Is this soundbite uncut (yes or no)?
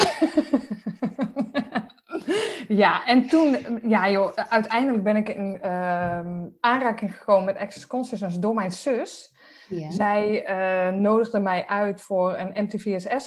yes